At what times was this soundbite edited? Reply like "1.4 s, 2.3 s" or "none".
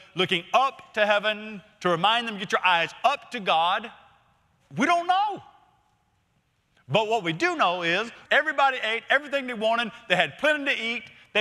4.6 s, 8.2 s

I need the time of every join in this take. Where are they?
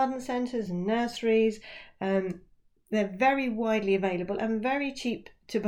none

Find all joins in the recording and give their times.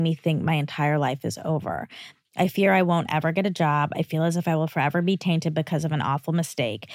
none

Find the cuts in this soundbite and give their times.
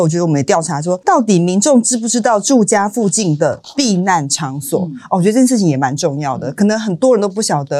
none

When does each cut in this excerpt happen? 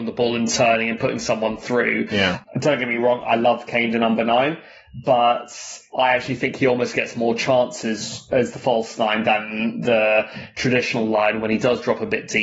none

